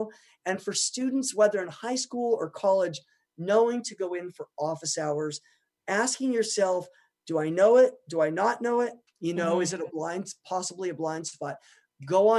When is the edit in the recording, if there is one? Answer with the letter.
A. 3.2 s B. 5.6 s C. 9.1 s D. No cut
C